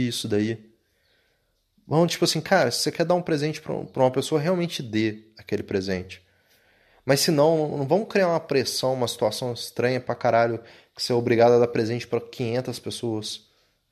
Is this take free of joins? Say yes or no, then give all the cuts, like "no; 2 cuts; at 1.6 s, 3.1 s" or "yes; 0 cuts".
yes; 0 cuts